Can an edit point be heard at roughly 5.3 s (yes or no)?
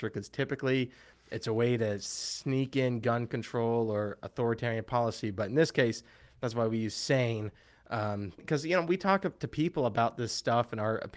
no